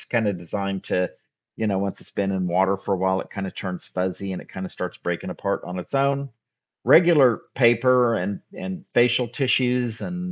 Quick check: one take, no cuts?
yes; 0 cuts

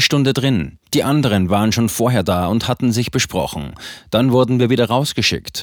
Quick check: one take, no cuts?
yes; 0 cuts

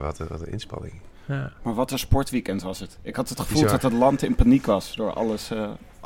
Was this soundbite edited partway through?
no; 0 cuts

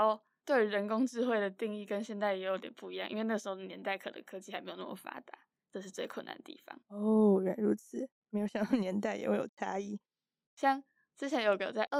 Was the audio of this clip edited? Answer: yes; 2 cuts; at 6.8 s, 10.5 s

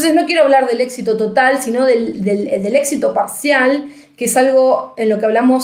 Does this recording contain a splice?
no; 0 cuts

